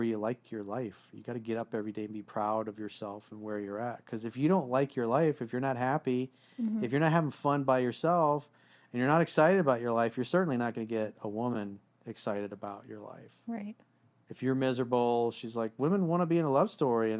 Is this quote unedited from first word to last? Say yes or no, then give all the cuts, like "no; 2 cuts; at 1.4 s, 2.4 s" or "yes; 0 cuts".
yes; 0 cuts